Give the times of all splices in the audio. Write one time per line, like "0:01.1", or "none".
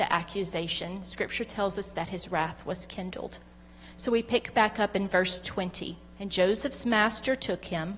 0:06.1